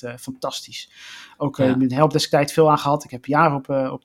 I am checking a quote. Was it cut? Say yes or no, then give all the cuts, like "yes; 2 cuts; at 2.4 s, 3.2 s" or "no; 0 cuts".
no; 0 cuts